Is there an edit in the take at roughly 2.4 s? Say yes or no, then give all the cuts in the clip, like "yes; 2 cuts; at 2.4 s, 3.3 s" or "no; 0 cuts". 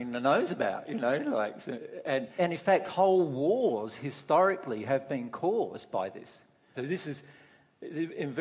yes; 2 cuts; at 2.4 s, 6.7 s